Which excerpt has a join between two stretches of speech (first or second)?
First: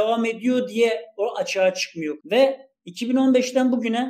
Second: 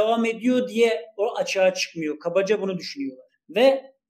first